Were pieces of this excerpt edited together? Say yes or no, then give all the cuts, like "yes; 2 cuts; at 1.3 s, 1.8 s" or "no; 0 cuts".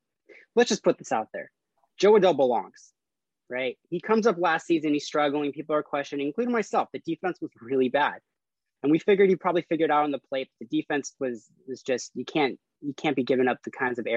no; 0 cuts